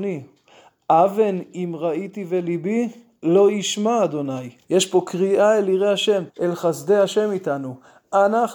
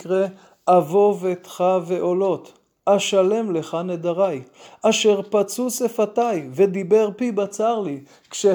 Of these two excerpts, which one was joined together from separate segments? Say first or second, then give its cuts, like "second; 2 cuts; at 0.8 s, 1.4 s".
first; 2 cuts; at 4.6 s, 6.3 s